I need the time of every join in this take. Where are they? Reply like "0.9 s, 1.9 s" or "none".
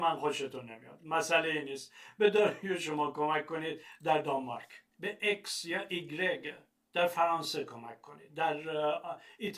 4.9 s